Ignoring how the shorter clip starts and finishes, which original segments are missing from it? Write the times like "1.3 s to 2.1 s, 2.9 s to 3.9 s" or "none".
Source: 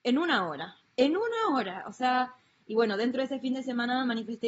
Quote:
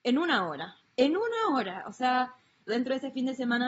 2.7 s to 3.0 s